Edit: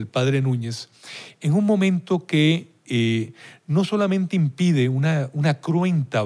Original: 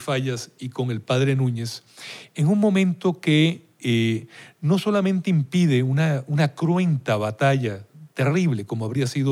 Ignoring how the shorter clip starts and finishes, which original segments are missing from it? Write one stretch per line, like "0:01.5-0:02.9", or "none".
none

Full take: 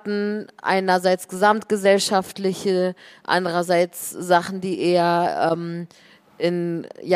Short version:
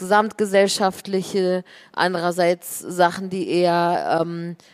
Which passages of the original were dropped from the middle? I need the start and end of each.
none

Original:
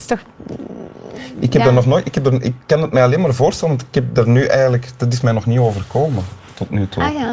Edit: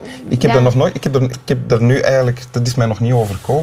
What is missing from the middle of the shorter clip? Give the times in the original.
0:02.4-0:03.8

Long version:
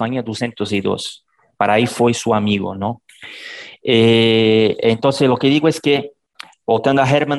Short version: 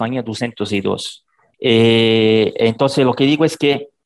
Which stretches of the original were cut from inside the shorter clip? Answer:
0:01.5-0:03.8

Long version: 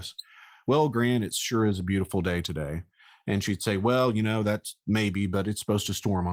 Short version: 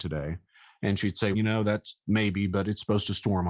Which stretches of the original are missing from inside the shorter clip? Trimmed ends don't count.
0:03.8-0:04.1

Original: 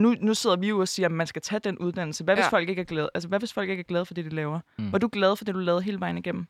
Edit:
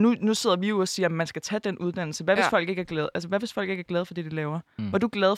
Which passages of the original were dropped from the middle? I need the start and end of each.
none

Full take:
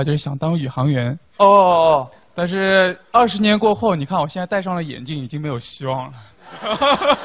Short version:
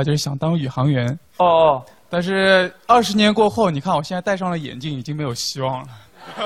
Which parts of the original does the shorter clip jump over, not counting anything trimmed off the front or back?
0:01.4-0:01.6

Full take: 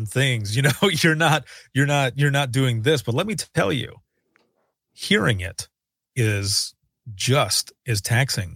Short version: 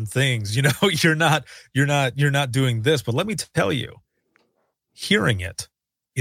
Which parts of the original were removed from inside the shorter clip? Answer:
none

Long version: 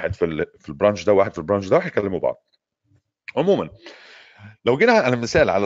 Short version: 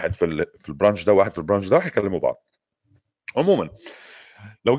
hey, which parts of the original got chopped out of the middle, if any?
none

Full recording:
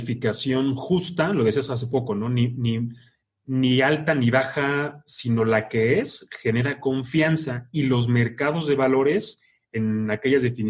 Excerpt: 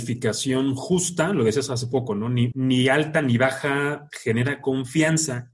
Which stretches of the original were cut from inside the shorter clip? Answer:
0:02.5-0:03.4
0:05.0-0:06.3

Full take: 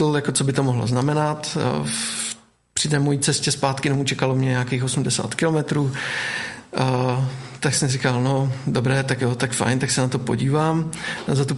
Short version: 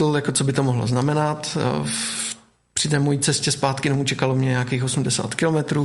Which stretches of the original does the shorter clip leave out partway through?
none

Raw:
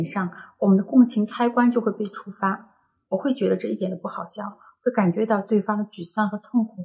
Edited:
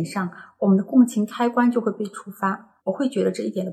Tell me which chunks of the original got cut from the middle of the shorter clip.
0:02.8-0:03.0

